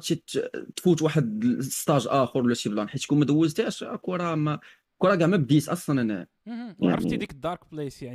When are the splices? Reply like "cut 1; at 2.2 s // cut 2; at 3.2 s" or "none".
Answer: none